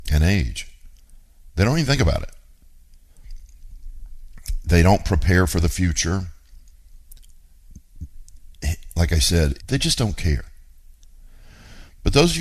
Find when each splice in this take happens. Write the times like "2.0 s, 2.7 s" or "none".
9.6 s